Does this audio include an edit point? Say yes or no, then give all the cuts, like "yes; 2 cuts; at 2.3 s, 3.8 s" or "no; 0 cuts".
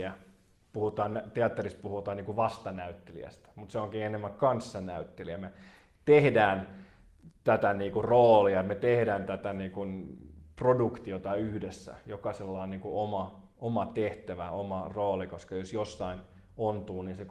no; 0 cuts